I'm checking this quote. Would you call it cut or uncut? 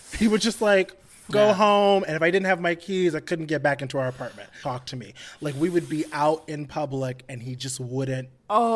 cut